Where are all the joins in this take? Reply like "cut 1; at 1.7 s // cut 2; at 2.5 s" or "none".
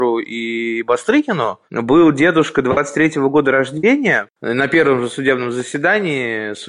cut 1; at 4.3 s